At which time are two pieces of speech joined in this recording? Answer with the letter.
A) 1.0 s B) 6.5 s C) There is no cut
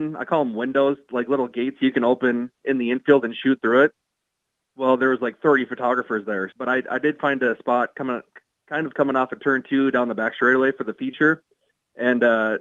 B